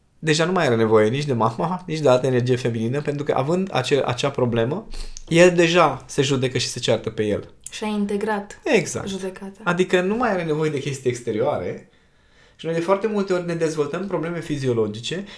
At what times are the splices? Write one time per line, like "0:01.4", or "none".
none